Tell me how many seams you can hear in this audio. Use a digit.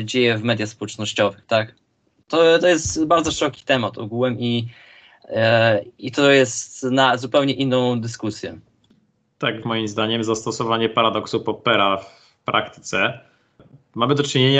1